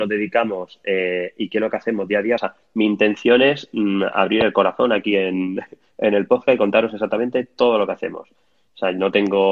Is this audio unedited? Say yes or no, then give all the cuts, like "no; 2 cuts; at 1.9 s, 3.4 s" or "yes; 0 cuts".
yes; 0 cuts